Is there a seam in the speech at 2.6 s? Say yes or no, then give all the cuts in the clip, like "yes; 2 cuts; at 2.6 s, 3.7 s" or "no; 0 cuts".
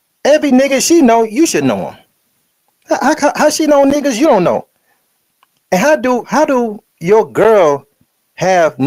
no; 1 cut; at 6.2 s